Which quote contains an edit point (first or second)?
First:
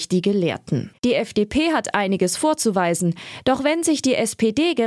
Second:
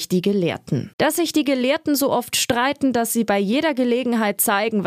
first